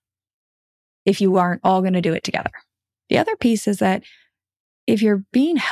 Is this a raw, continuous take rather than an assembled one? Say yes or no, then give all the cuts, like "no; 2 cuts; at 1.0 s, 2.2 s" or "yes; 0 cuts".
no; 1 cut; at 3.0 s